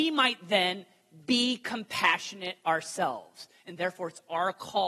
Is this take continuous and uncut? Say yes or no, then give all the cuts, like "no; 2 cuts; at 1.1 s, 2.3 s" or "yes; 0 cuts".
no; 1 cut; at 3.6 s